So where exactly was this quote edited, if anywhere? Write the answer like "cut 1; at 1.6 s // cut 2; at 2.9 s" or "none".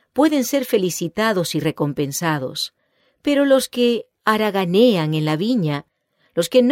none